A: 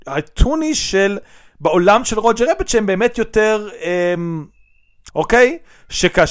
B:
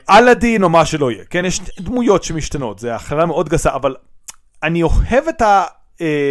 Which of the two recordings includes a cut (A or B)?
A